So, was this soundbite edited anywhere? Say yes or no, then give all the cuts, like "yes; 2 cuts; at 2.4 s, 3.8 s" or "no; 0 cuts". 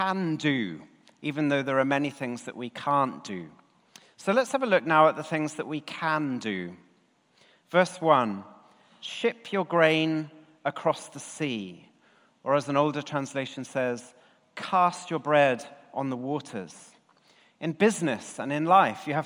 no; 0 cuts